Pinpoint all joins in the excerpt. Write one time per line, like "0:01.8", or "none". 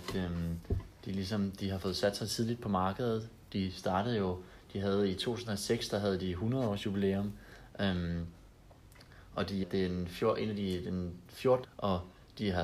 0:09.6
0:11.6